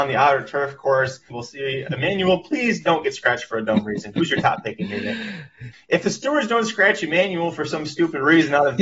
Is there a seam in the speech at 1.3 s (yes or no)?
yes